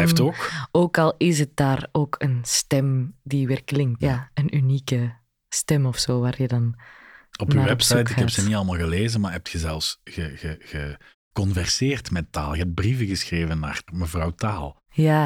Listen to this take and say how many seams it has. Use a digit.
2